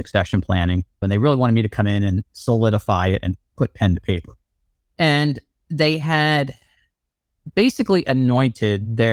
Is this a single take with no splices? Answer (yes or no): no